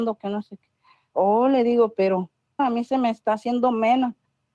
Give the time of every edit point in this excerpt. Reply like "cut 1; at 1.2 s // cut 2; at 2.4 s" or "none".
cut 1; at 2.6 s